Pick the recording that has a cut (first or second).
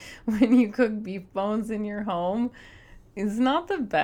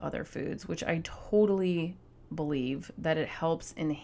first